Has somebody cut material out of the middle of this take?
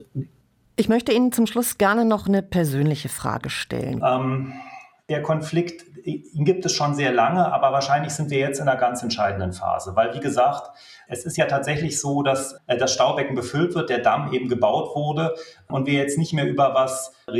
yes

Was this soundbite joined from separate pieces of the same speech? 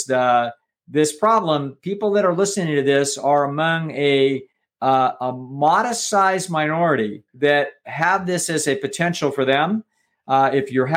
yes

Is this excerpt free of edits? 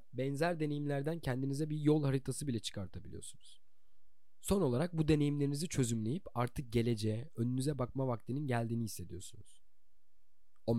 yes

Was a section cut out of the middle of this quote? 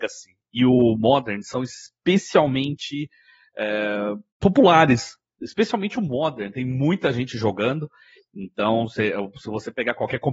yes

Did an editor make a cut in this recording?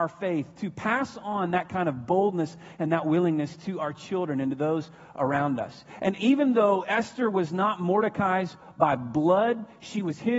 no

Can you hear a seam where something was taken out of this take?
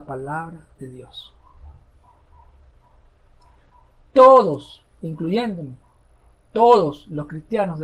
no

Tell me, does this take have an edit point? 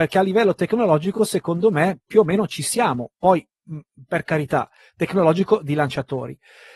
no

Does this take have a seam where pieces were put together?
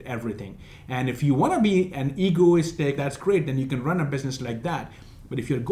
yes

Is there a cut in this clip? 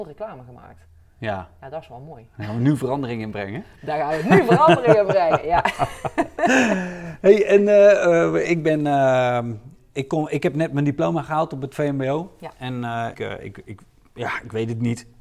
yes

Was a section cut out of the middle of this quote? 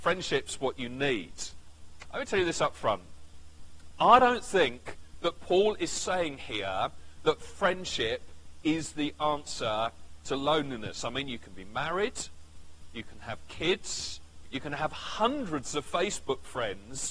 yes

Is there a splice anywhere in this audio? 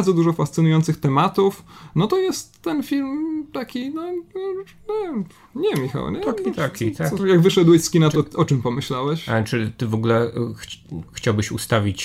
yes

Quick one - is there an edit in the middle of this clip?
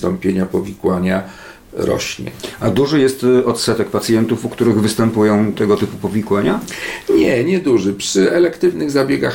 no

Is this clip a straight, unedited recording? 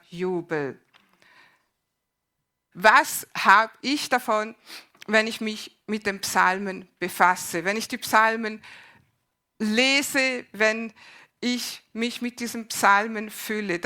no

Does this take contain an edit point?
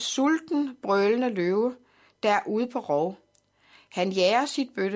no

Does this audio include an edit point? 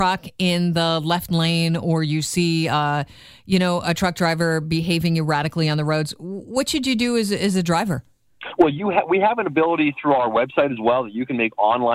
no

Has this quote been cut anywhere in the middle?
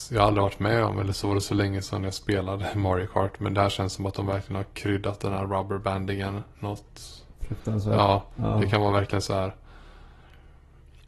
no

